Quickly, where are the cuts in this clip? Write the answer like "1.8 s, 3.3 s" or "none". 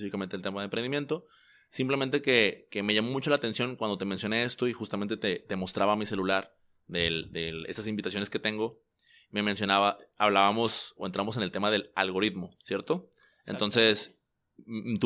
none